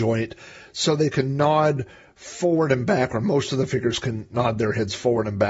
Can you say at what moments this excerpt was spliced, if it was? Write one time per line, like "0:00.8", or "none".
none

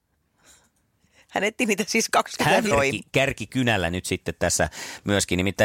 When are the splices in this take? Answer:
0:02.7

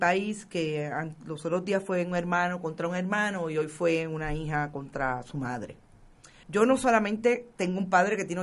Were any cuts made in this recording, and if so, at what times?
0:06.4

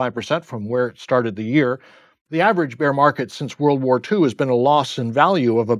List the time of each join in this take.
none

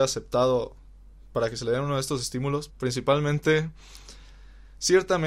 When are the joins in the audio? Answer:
0:02.7

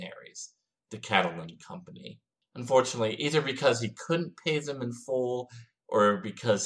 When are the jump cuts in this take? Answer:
none

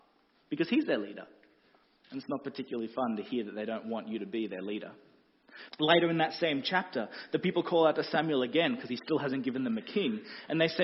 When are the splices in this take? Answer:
0:05.7

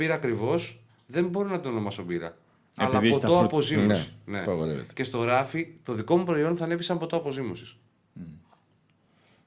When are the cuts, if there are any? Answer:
none

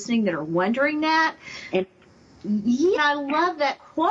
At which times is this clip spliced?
0:01.7
0:03.0

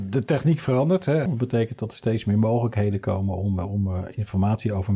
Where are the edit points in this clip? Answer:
0:01.3

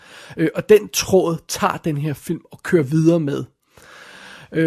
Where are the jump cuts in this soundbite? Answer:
none

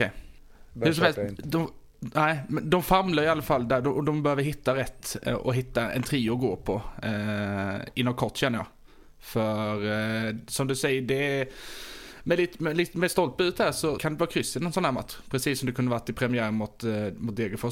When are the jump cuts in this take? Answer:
0:14.0

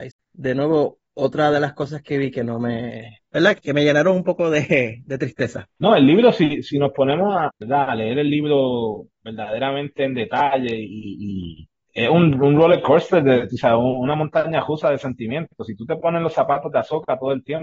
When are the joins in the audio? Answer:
0:05.8
0:07.5

